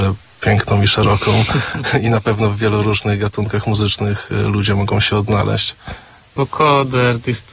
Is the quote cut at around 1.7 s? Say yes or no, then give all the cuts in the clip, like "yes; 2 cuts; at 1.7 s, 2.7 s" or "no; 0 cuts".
no; 1 cut; at 6.4 s